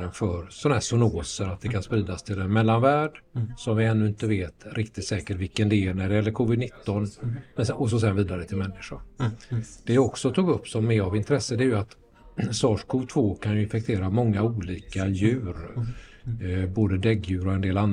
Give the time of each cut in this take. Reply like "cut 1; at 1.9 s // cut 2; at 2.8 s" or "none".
none